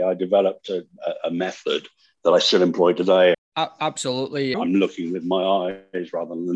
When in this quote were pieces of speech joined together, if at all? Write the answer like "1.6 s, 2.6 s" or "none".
3.3 s, 4.5 s